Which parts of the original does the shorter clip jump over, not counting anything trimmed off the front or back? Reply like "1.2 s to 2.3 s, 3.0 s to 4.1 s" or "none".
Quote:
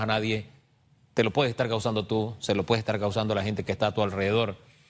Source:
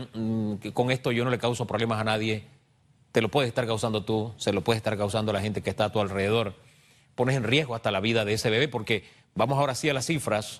none

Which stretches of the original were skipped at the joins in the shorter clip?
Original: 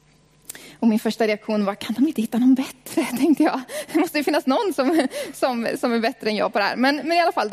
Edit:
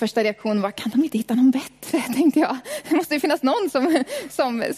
none

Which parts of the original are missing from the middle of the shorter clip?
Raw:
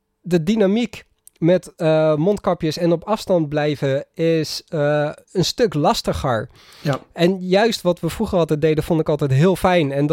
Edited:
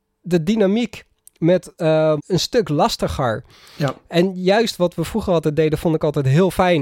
2.2 s to 5.2 s

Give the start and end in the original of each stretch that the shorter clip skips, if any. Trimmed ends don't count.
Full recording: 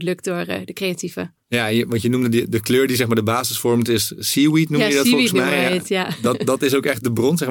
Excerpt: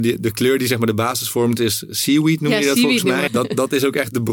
5.6 s to 6.2 s

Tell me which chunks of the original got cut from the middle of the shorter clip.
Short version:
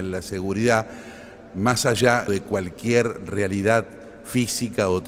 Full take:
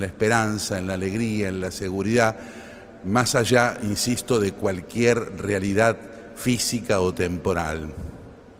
3.8 s to 4.4 s

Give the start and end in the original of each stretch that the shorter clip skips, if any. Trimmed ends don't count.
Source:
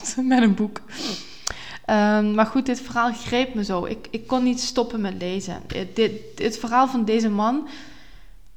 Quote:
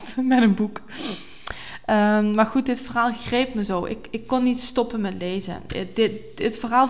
none

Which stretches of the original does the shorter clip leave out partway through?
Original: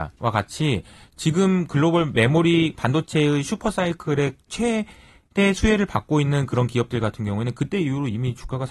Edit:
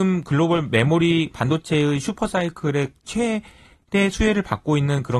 none

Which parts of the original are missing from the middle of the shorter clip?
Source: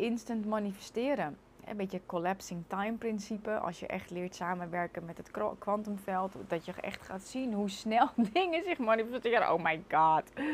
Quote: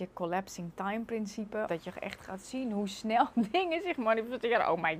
3.6 s to 6.5 s

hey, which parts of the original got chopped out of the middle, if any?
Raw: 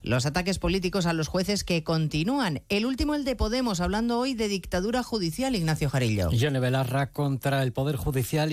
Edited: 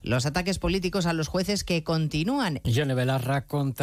2.6 s to 6.3 s

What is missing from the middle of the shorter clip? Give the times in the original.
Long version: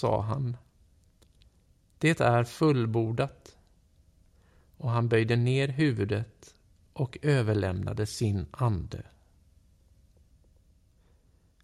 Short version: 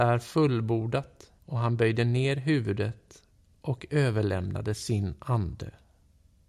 3.6 s to 4.7 s

